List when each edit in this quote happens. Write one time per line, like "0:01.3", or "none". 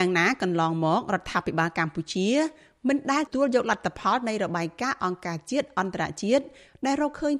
0:03.3